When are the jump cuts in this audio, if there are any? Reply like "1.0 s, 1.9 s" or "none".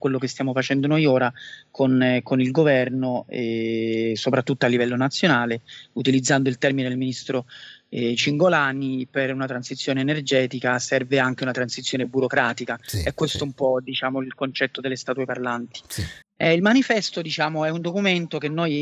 16.2 s